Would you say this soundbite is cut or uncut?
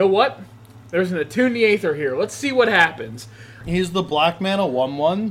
cut